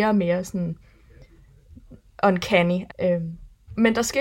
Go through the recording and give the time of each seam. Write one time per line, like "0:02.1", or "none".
0:02.9